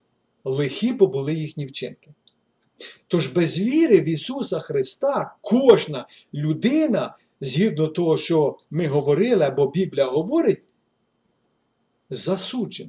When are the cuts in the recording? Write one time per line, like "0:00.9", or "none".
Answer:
none